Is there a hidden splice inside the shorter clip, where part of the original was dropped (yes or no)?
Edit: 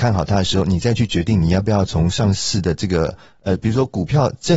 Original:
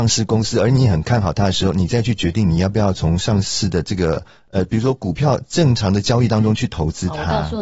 no